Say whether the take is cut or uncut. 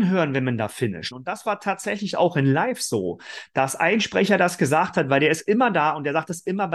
cut